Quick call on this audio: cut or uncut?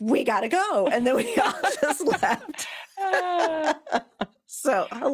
uncut